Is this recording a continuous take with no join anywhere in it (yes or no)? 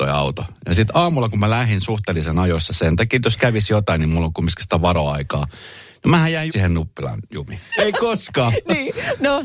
no